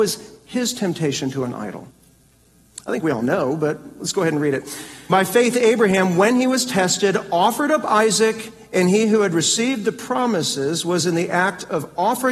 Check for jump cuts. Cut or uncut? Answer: cut